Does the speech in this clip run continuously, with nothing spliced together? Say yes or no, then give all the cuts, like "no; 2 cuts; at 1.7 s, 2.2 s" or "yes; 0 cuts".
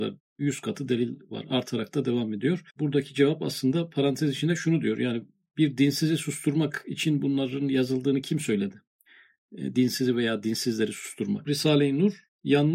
no; 2 cuts; at 2.7 s, 11.4 s